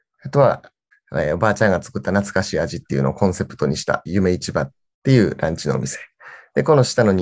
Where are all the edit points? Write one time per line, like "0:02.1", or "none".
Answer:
0:00.9
0:04.1